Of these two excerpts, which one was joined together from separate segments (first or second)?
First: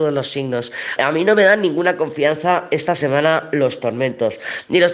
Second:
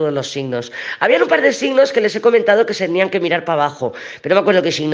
first